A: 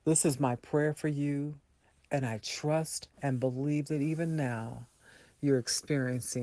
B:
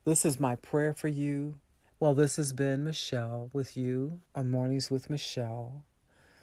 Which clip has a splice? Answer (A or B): B